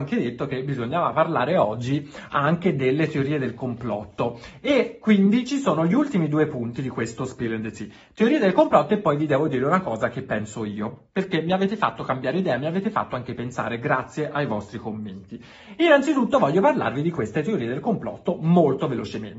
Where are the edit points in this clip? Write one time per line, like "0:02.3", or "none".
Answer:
none